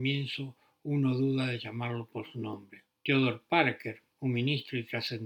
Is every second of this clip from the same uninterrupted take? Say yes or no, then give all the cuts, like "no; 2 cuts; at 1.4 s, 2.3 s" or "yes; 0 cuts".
no; 1 cut; at 3.0 s